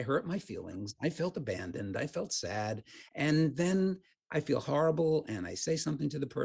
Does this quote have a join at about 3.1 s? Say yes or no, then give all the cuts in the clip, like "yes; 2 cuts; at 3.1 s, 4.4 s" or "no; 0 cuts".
no; 0 cuts